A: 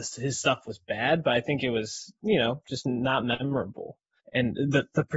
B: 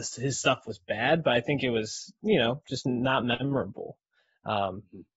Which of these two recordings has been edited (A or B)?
A